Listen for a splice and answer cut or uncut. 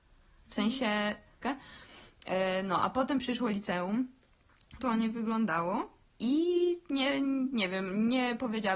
cut